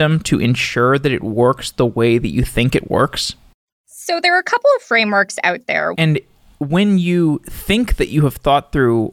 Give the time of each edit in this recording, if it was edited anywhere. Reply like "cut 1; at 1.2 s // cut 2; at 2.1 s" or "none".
cut 1; at 5.9 s